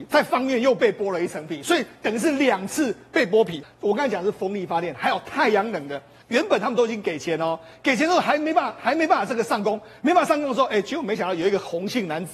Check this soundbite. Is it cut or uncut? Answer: cut